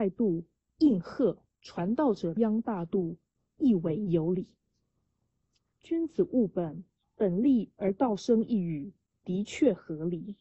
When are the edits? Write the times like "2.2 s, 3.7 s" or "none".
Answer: 2.4 s, 5.7 s